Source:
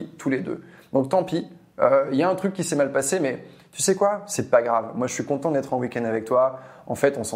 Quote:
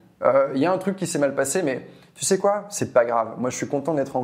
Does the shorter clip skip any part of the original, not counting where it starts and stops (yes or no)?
no